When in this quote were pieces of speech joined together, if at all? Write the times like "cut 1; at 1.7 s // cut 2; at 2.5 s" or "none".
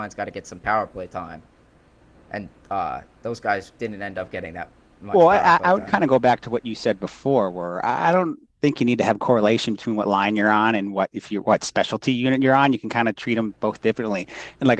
none